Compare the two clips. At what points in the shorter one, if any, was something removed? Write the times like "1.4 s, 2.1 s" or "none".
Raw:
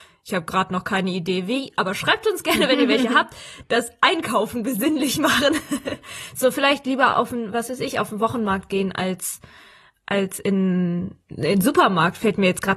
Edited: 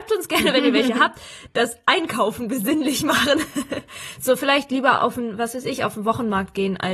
none